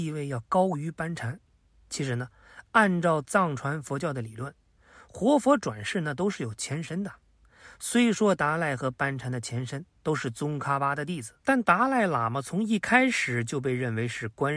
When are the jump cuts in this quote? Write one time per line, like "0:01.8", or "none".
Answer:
0:11.4